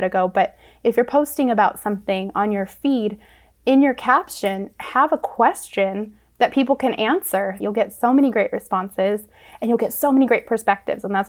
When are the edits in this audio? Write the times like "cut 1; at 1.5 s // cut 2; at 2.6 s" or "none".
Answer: cut 1; at 7.6 s